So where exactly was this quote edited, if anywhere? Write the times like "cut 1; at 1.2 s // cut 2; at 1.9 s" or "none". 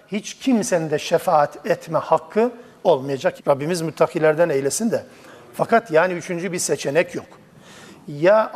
cut 1; at 3.4 s

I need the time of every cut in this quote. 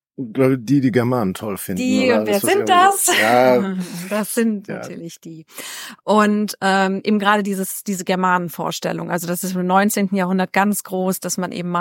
none

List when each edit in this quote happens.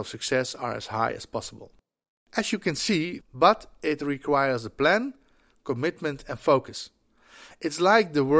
cut 1; at 3.2 s

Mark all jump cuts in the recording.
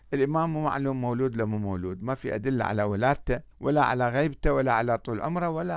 cut 1; at 3.5 s

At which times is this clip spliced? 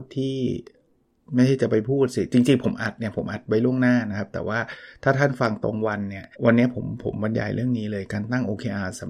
cut 1; at 6.3 s

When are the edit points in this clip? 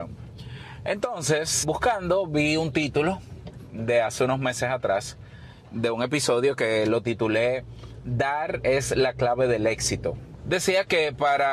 cut 1; at 1.6 s // cut 2; at 10.4 s

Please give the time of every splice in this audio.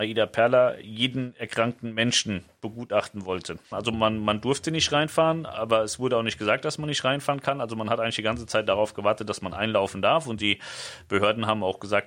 cut 1; at 3.7 s

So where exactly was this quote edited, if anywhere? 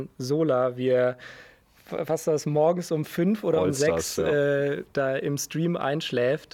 none

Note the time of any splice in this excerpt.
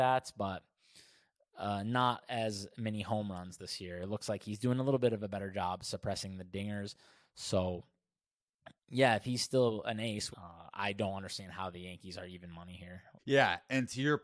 cut 1; at 10.3 s // cut 2; at 13.2 s

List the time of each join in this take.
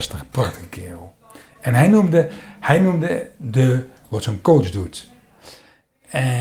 cut 1; at 4.0 s

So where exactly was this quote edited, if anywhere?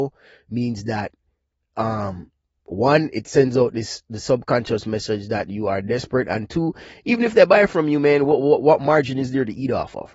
none

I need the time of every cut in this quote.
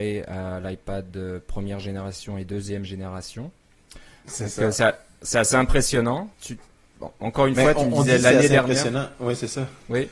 cut 1; at 6.3 s

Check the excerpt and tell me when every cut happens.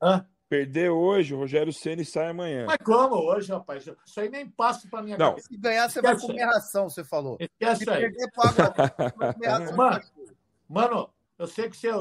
cut 1; at 4.1 s // cut 2; at 5.4 s

